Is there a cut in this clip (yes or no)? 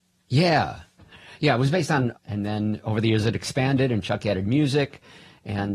yes